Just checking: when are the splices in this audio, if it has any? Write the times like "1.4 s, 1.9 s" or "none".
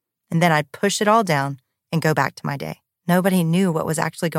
3.0 s